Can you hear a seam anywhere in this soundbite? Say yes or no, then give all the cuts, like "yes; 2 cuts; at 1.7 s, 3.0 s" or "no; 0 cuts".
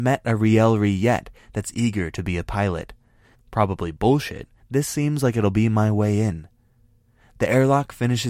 yes; 2 cuts; at 3.3 s, 4.6 s